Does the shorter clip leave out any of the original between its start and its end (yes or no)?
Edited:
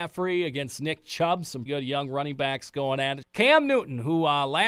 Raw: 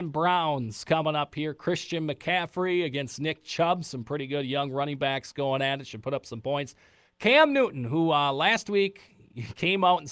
yes